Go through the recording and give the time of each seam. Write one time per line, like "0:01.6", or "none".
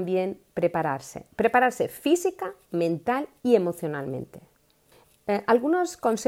none